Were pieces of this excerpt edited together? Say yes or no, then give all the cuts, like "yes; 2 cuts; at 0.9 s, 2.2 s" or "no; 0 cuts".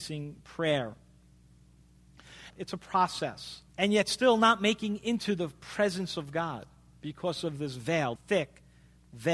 yes; 3 cuts; at 2.5 s, 3.7 s, 8.2 s